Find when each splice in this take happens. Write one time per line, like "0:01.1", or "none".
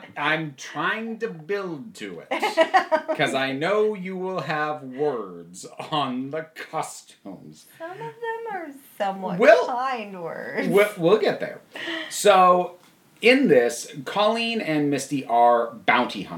none